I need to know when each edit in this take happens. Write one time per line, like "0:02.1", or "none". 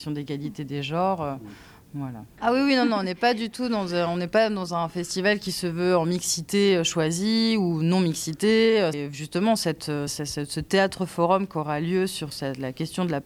0:02.4
0:08.9
0:10.1